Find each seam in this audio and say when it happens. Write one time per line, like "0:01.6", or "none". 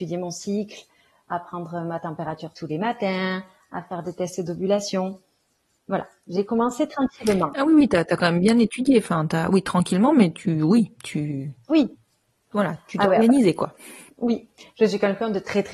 none